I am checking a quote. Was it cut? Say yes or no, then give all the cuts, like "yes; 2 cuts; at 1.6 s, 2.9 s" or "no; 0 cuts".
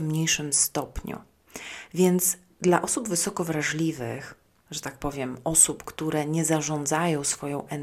yes; 1 cut; at 4.6 s